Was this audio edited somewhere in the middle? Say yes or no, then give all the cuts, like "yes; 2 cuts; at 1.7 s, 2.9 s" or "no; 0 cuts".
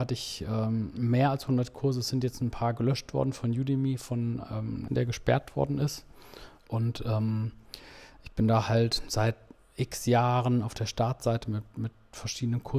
yes; 2 cuts; at 4.9 s, 6.6 s